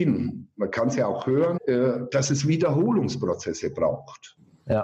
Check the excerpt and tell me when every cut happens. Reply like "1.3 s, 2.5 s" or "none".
1.6 s